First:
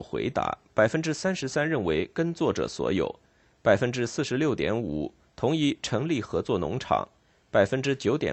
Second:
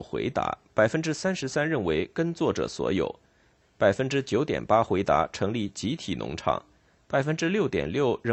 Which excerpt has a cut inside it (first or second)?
second